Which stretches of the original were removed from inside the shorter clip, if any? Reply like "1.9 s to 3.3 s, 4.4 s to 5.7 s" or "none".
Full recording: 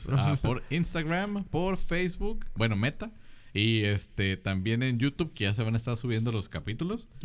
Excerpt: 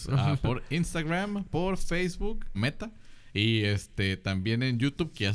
2.5 s to 2.7 s